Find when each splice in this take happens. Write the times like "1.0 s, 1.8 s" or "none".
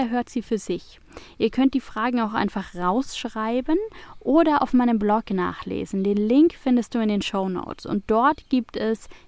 none